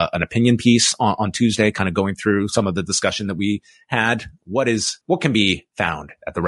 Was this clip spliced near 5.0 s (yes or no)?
yes